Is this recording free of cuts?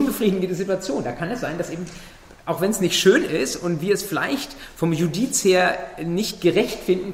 yes; 0 cuts

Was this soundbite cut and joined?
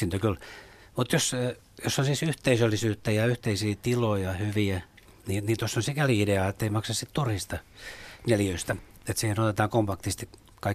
no; 0 cuts

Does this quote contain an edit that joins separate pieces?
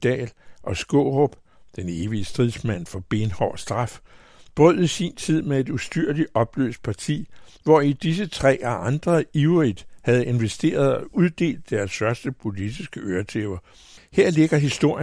yes; 1 cut; at 14.0 s

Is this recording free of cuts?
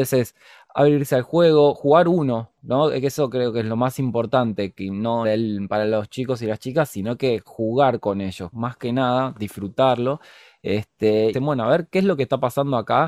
no; 3 cuts; at 5.2 s, 8.5 s, 11.3 s

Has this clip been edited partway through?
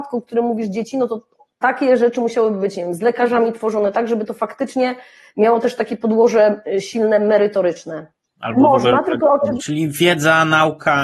yes; 2 cuts; at 8.4 s, 9.6 s

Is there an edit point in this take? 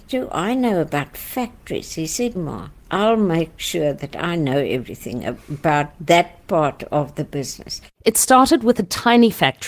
yes; 1 cut; at 2.4 s

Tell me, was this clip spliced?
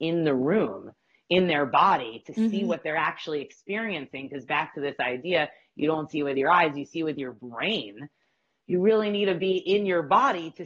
no; 0 cuts

